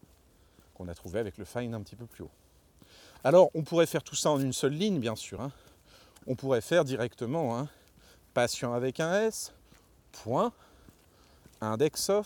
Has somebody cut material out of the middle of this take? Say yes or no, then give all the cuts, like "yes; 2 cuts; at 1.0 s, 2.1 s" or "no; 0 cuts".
no; 0 cuts